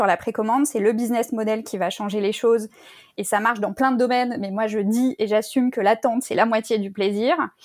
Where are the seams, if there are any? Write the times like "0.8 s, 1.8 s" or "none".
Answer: none